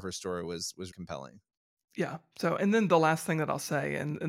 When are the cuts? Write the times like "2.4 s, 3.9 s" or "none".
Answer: 0.9 s